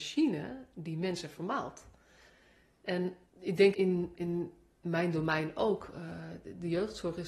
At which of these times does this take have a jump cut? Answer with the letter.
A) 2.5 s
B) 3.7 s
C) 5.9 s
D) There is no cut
B